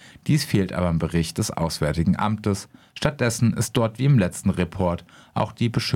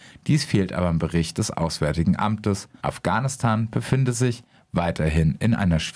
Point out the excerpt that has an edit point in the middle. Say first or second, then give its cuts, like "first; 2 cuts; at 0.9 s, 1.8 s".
second; 1 cut; at 2.8 s